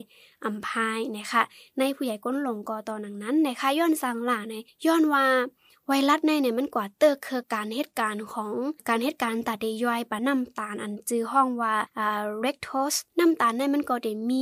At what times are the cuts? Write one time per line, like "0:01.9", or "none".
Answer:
0:07.4
0:10.2